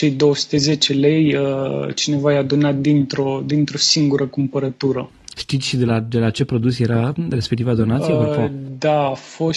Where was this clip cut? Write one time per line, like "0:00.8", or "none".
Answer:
0:05.3